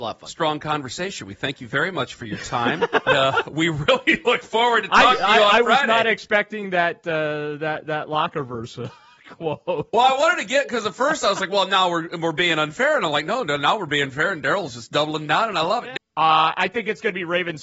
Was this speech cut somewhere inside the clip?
yes; 2 cuts; at 3.1 s, 16.0 s

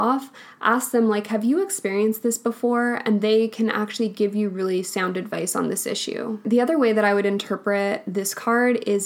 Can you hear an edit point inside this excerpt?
no; 0 cuts

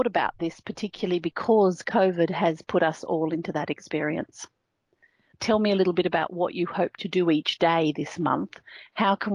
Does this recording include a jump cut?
yes; 1 cut; at 5.3 s

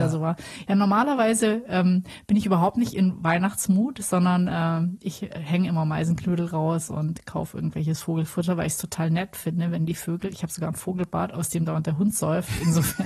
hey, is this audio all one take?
yes; 0 cuts

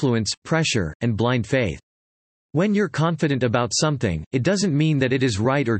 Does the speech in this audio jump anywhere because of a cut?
no; 0 cuts

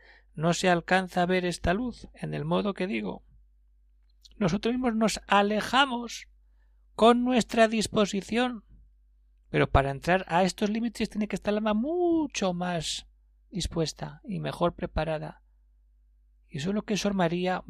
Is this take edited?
yes; 1 cut; at 9.4 s

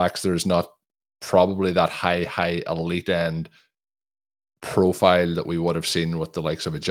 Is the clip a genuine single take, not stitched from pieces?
yes; 0 cuts

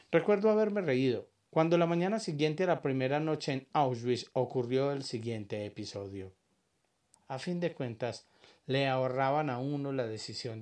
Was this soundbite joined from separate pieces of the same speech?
yes; 2 cuts; at 1.5 s, 7.1 s

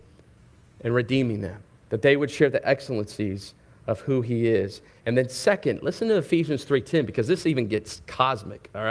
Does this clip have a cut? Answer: no; 0 cuts

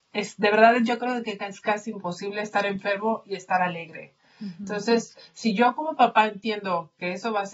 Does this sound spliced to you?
no; 0 cuts

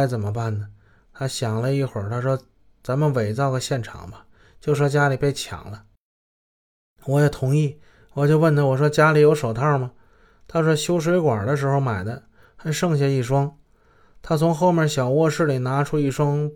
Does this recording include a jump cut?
no; 0 cuts

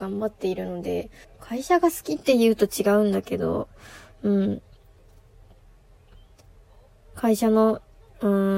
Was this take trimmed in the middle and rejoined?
yes; 1 cut; at 1.2 s

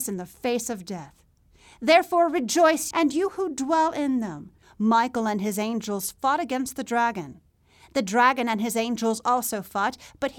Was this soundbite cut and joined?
yes; 2 cuts; at 2.9 s, 4.6 s

